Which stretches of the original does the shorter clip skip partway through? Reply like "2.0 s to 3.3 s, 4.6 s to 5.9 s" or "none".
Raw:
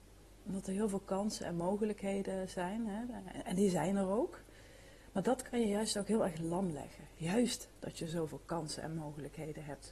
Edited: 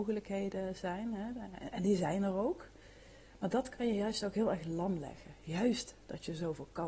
none